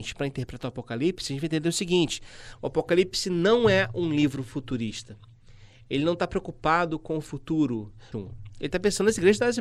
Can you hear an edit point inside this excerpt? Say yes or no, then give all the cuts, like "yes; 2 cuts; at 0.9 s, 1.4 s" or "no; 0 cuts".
yes; 1 cut; at 8.1 s